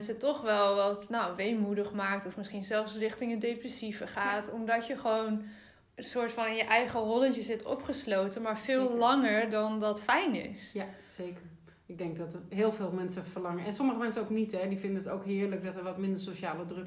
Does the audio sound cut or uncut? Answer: uncut